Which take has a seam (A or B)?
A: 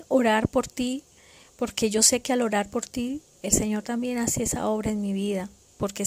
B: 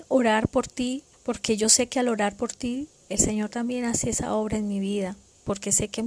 B